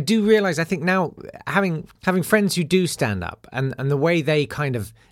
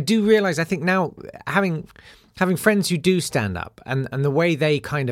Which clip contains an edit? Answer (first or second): first